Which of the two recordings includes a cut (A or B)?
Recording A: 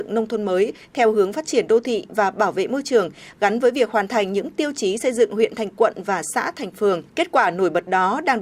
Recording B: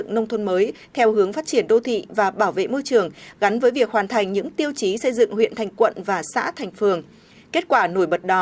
A